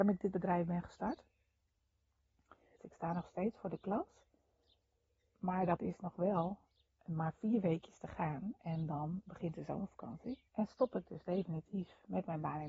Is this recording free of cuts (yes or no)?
no